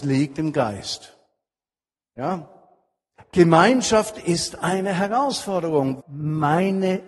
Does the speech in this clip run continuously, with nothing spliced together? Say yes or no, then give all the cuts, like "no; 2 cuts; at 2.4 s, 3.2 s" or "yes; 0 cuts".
no; 2 cuts; at 3.2 s, 6.0 s